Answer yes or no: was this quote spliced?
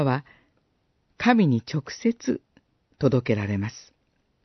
yes